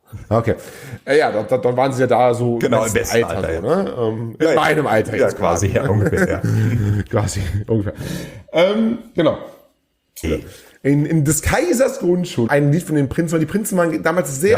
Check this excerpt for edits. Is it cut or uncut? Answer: cut